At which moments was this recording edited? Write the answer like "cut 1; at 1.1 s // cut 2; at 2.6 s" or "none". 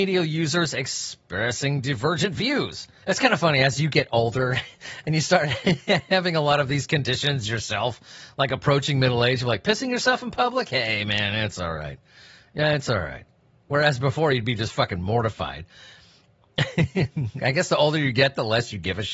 cut 1; at 3.0 s